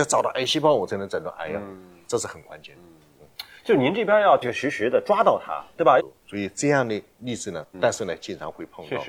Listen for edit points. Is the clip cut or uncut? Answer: cut